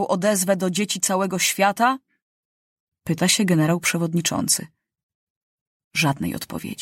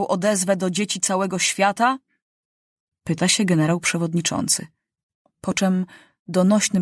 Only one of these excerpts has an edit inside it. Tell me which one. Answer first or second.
second